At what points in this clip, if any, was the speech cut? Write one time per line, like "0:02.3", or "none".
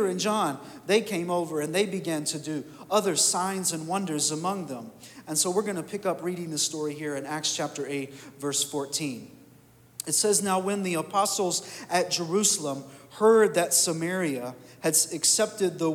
none